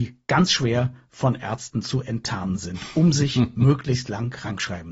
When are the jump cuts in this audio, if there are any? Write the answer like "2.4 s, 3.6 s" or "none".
none